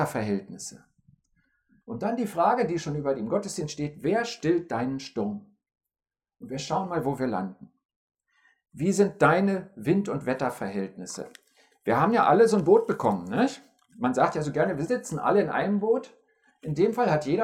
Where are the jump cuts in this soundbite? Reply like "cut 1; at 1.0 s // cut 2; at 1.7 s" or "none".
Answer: cut 1; at 1.8 s